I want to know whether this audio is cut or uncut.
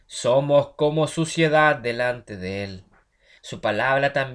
cut